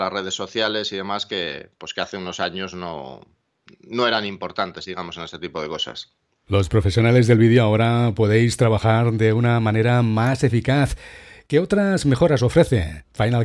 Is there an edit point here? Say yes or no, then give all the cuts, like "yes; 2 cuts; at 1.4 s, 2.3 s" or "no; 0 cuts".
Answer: no; 0 cuts